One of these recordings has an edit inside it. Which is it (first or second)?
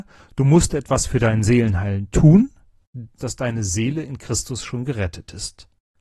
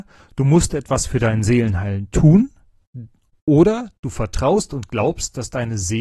first